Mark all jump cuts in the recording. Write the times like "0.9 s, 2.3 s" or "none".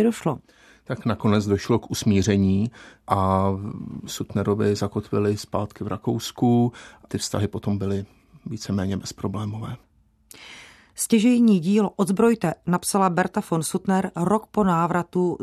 none